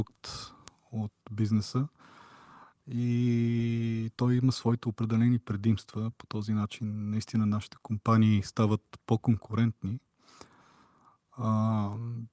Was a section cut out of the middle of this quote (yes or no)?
no